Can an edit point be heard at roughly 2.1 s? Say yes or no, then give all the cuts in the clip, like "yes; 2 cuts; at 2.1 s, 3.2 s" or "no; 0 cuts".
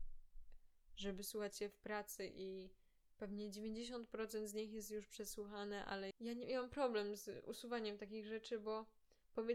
no; 1 cut; at 6.1 s